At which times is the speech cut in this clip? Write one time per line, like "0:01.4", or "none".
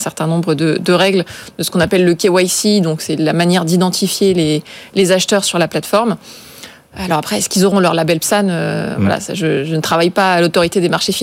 none